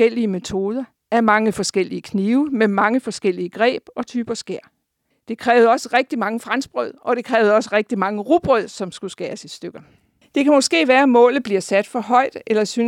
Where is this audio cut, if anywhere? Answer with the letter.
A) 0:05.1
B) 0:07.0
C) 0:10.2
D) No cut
C